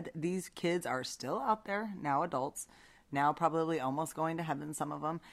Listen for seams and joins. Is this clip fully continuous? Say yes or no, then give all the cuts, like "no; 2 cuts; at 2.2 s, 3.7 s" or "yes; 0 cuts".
yes; 0 cuts